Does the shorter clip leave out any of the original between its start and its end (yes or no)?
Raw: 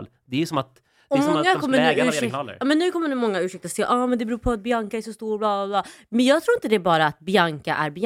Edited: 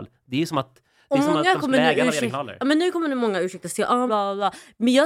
yes